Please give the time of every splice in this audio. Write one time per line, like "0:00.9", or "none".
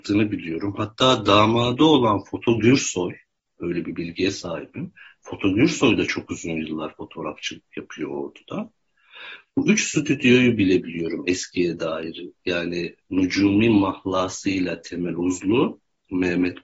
0:03.5